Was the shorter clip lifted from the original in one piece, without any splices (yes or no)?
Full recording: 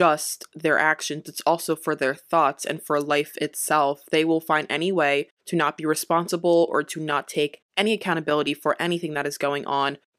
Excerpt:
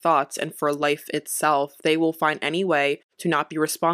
yes